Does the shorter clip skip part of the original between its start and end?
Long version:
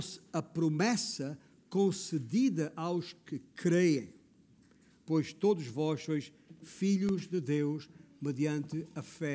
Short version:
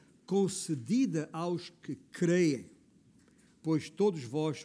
no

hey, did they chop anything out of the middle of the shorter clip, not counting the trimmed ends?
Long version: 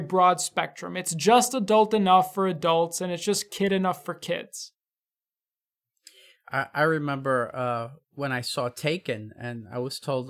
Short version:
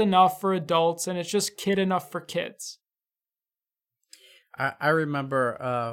no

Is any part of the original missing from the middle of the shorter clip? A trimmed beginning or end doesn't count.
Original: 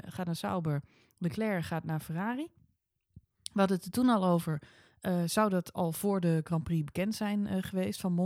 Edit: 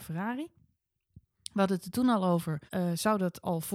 yes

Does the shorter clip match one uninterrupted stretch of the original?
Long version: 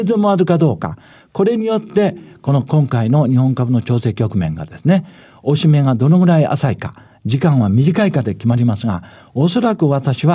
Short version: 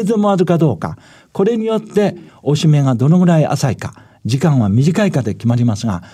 no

